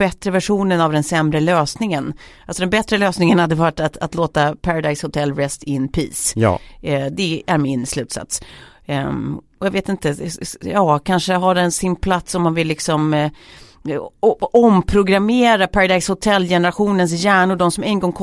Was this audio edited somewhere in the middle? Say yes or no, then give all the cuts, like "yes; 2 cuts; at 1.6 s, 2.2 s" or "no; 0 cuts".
no; 0 cuts